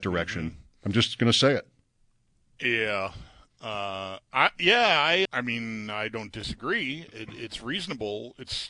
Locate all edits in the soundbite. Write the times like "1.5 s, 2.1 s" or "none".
5.3 s